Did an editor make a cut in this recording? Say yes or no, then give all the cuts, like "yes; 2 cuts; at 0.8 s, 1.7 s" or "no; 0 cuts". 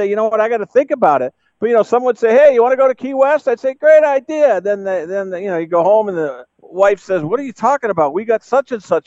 yes; 1 cut; at 6.5 s